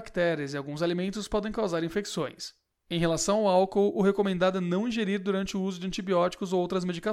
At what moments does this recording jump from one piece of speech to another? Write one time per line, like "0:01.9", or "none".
0:02.7

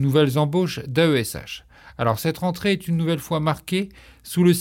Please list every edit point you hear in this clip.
none

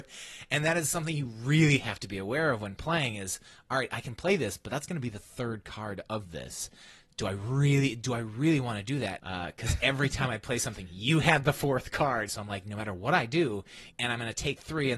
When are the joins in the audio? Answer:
0:09.2
0:12.3
0:13.9

